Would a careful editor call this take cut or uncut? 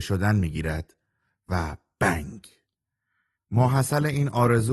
cut